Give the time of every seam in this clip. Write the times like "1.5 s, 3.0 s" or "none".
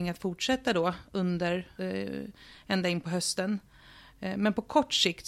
1.8 s